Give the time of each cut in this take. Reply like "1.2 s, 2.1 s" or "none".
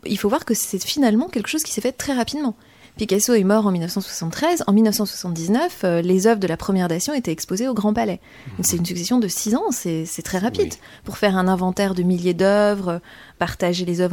none